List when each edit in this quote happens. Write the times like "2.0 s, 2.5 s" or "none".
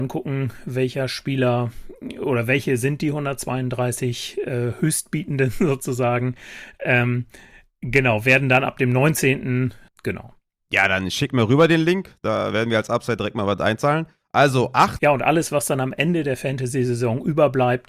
9.9 s, 15.0 s